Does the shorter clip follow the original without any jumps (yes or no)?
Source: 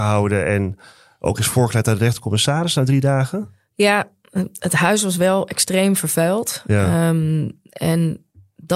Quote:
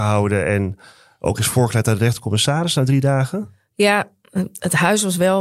yes